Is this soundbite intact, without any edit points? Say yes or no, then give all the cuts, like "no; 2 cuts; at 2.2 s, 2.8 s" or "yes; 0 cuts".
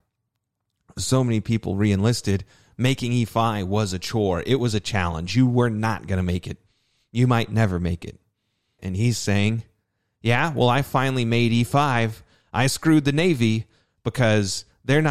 no; 1 cut; at 8.8 s